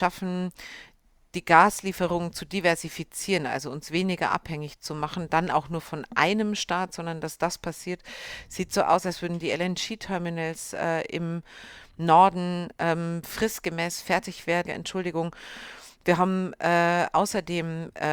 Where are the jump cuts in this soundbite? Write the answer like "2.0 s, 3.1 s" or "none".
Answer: 14.7 s